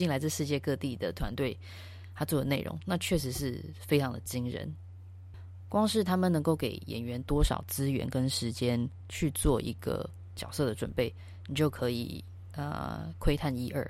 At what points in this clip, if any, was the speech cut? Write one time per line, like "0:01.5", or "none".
none